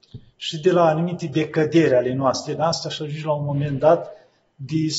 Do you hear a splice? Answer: yes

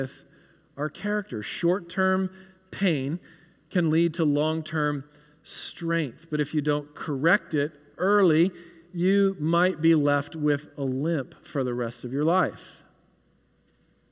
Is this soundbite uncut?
yes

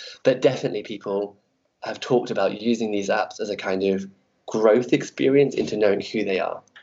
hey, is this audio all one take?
yes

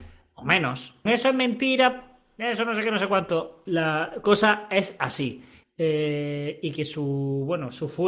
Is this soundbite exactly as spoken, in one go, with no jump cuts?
no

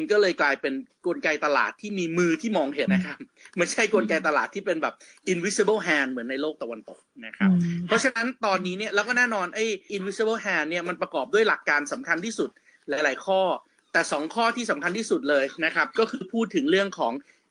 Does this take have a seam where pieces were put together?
yes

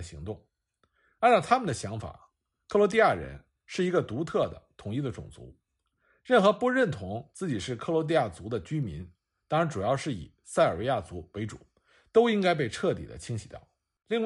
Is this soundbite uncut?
yes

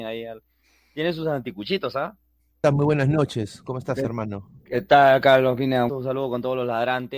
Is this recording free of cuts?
no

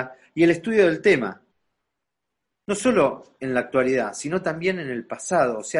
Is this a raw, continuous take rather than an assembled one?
yes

